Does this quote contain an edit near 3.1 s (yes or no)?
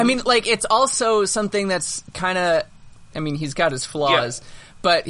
yes